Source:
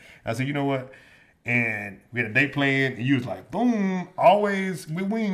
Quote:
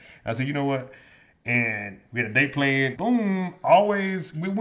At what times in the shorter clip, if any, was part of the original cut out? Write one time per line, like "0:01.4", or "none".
0:02.9